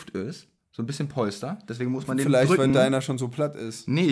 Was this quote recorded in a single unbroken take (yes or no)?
yes